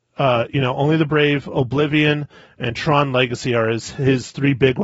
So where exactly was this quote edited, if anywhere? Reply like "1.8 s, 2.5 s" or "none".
none